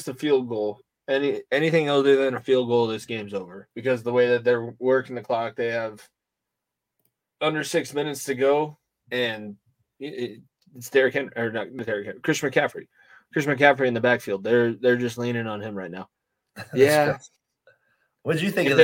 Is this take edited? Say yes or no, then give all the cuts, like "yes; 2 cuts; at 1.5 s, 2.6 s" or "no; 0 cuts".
yes; 1 cut; at 3.7 s